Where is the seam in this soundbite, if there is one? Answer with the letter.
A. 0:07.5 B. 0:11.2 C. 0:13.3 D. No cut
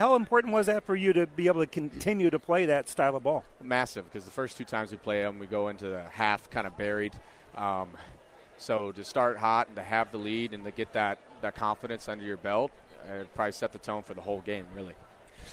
D